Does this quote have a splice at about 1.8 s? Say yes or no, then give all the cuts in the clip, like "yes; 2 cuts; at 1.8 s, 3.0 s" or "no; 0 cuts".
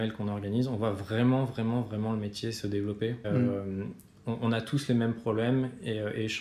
no; 1 cut; at 3.2 s